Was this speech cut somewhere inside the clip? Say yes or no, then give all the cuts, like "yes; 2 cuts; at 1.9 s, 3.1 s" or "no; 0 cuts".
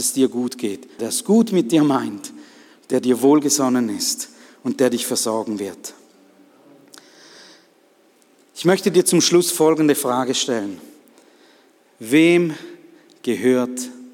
yes; 1 cut; at 1.0 s